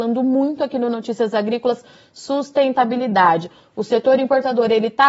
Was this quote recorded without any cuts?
yes; 0 cuts

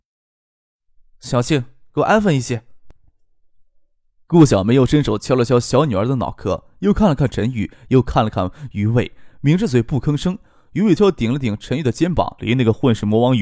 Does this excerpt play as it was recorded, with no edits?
no; 2 cuts; at 11.0 s, 12.4 s

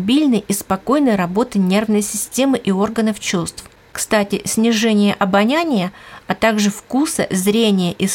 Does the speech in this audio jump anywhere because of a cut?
no; 0 cuts

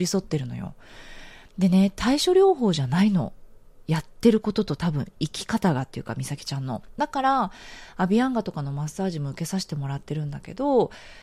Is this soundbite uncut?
yes; 0 cuts

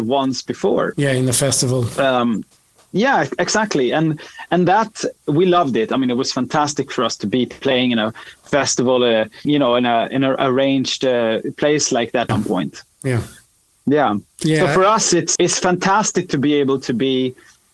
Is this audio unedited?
no; 3 cuts; at 9.4 s, 12.3 s, 15.4 s

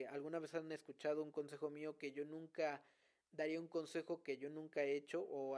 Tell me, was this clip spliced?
no; 0 cuts

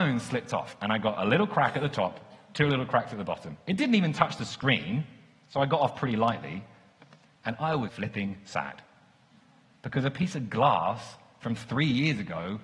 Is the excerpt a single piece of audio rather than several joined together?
no; 1 cut; at 7.9 s

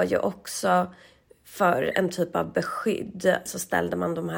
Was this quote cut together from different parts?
yes; 1 cut; at 3.5 s

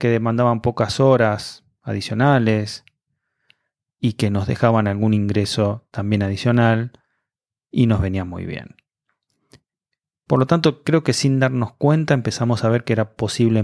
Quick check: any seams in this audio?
no; 0 cuts

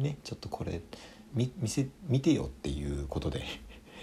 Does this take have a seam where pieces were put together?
yes; 1 cut; at 1.3 s

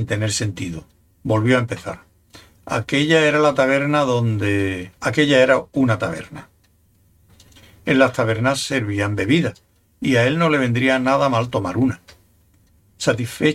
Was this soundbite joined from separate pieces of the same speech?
yes; 1 cut; at 5.0 s

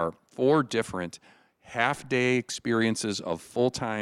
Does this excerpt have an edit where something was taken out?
no; 0 cuts

